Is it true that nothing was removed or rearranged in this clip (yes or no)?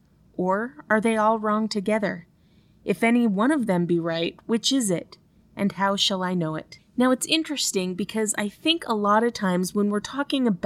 yes